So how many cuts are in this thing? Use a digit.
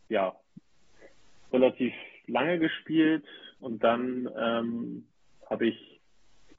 1